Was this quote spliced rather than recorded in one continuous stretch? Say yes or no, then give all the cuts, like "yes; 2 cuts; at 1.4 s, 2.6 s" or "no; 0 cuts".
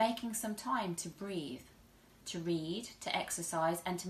yes; 1 cut; at 2.1 s